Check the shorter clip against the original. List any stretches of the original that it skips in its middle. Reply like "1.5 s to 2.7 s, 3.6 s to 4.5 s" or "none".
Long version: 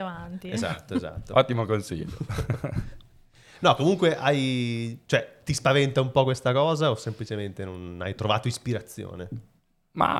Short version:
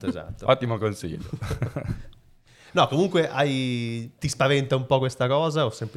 5.1 s to 5.4 s

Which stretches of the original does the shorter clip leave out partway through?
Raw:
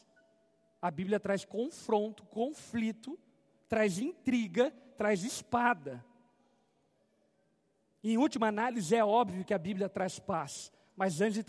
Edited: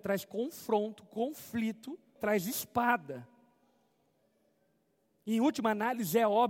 3.4 s to 4.9 s

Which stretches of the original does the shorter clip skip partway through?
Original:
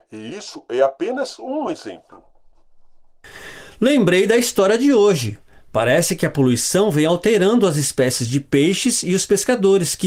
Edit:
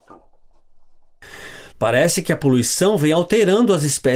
3.7 s to 5.6 s

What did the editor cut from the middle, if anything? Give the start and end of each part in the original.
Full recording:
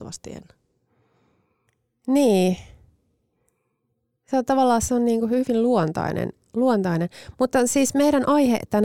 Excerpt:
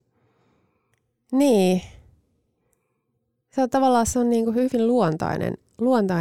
none

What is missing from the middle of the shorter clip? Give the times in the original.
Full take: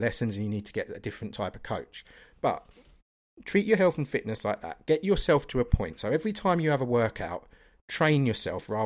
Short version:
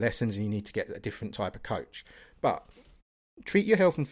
none

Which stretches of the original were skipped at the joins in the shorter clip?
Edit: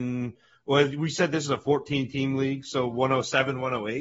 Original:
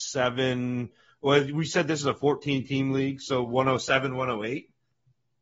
none

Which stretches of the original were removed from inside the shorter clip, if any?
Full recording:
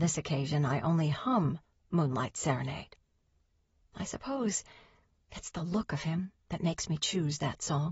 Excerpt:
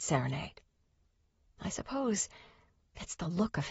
none

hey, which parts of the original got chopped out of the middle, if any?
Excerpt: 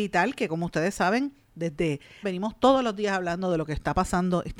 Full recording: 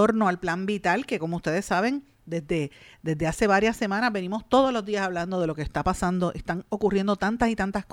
2.9 s to 4.1 s

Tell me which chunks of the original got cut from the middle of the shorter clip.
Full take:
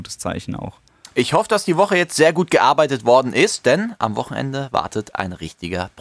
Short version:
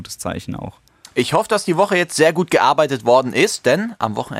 none

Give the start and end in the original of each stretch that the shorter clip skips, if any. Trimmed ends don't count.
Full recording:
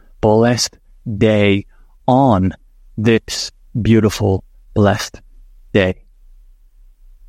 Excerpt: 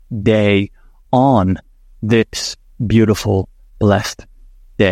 none

